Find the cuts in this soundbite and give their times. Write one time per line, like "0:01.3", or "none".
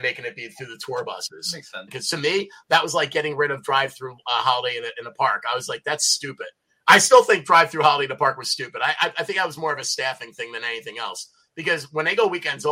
0:01.9